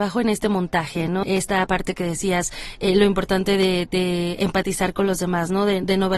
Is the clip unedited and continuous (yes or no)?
no